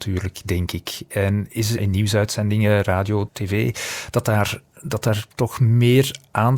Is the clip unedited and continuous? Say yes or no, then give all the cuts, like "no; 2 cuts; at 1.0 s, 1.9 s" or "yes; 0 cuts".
no; 2 cuts; at 1.8 s, 3.3 s